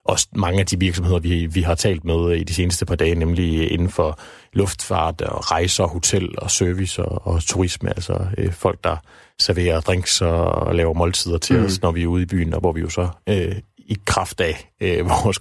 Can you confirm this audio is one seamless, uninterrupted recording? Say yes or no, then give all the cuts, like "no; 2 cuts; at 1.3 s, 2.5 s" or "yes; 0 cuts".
yes; 0 cuts